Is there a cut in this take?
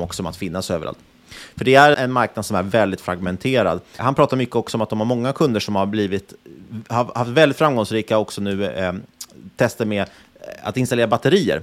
yes; 2 cuts; at 1.9 s, 4.0 s

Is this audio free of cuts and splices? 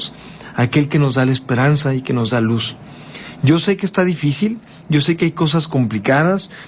yes; 0 cuts

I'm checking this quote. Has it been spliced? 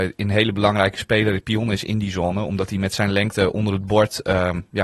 no; 0 cuts

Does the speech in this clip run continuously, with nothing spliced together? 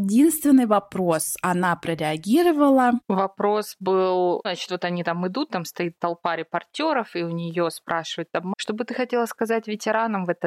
no; 2 cuts; at 4.4 s, 8.5 s

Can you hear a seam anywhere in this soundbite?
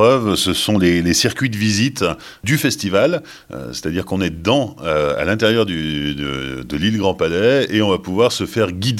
no; 0 cuts

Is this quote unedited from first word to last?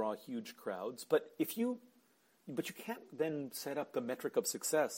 yes; 0 cuts

